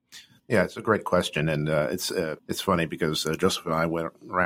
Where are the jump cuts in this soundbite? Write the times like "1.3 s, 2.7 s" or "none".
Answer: 2.4 s